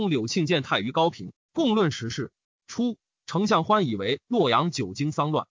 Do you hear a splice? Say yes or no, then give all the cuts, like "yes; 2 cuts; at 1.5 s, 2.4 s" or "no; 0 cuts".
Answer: yes; 1 cut; at 2.5 s